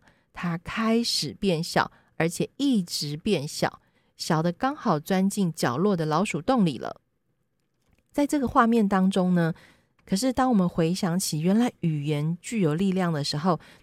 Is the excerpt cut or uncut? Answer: cut